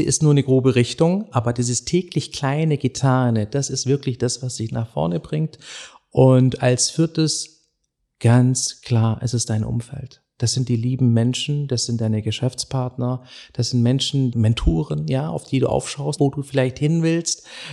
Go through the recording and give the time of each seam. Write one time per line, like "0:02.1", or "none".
0:14.3
0:16.2